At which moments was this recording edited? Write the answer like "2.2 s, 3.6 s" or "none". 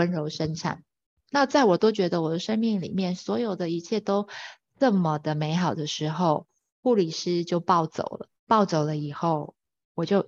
6.7 s, 8.4 s